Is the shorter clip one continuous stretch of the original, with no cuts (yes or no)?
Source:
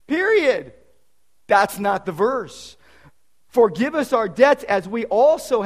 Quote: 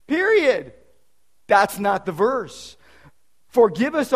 yes